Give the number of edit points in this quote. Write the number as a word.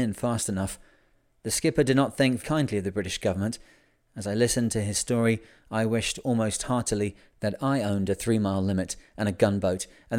one